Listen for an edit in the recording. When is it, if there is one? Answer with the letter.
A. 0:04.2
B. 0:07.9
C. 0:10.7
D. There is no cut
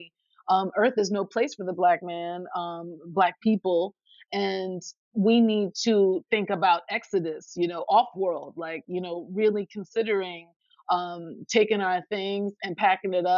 D